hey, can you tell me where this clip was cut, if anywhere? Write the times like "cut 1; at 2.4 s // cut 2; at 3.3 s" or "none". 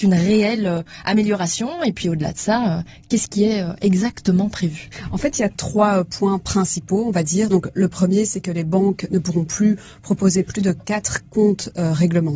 none